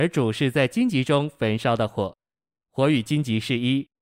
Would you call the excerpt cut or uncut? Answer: uncut